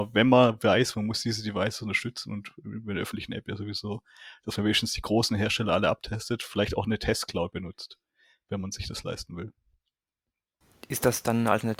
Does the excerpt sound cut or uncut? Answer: uncut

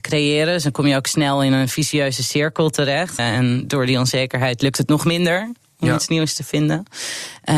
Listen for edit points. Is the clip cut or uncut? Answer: cut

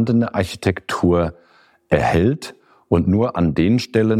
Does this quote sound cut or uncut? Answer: uncut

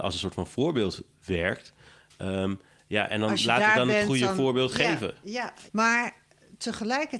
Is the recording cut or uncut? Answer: cut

